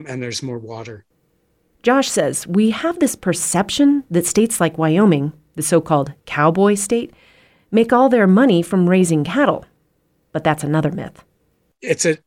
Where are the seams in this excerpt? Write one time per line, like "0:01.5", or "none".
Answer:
none

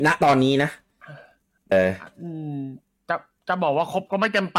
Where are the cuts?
0:01.7

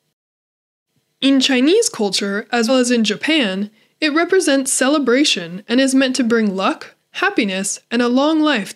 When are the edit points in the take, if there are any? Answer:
0:02.7
0:07.0

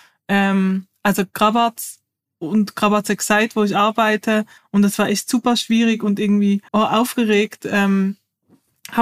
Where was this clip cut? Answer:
0:04.6
0:06.7

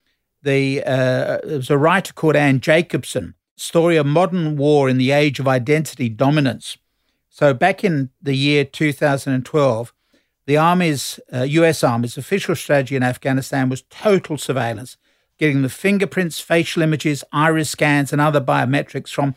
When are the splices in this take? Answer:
none

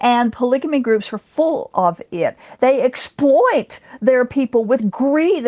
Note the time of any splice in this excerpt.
none

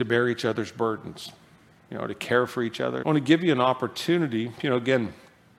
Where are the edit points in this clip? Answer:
0:03.0

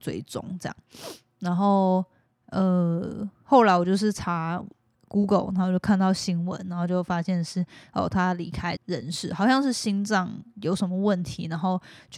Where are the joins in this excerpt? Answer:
0:08.8

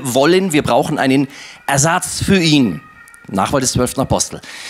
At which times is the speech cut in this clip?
none

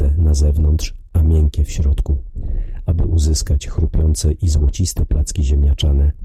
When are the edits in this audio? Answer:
none

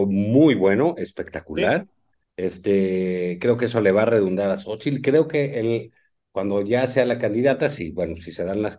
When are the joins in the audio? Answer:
none

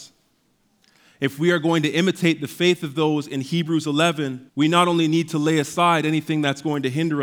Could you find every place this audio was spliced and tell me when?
0:04.5

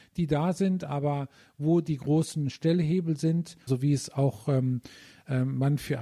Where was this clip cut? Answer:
0:03.7

